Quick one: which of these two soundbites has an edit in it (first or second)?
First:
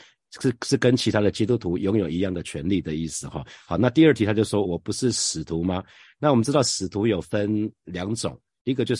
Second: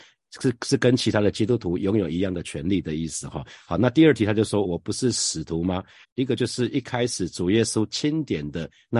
second